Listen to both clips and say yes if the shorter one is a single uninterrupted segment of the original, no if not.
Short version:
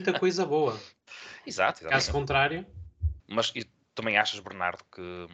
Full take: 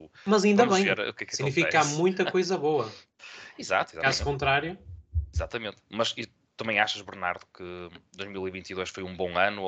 no